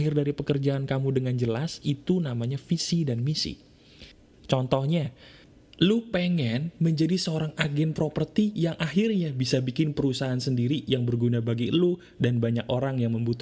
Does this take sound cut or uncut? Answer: cut